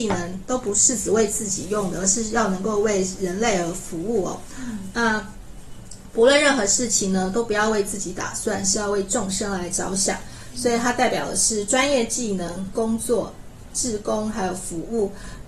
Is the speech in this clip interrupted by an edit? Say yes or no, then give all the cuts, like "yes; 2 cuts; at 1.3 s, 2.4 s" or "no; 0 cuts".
no; 0 cuts